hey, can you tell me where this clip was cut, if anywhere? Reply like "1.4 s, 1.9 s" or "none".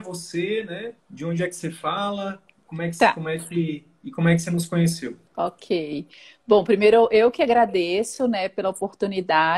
none